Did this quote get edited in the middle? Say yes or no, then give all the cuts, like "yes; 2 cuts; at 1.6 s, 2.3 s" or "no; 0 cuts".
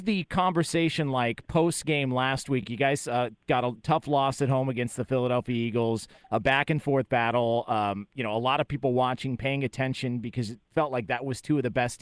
no; 0 cuts